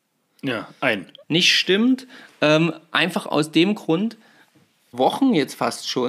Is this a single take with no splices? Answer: no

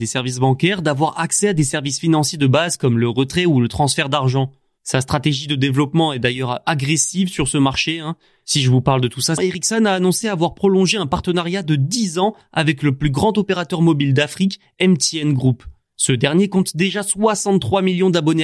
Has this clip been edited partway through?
yes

